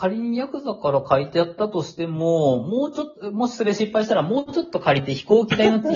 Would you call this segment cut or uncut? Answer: uncut